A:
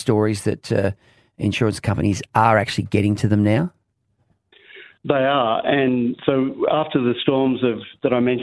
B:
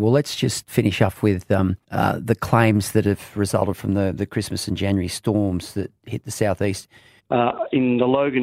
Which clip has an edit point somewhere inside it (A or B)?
B